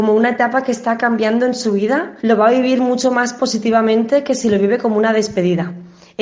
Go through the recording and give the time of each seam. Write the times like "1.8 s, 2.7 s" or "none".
2.2 s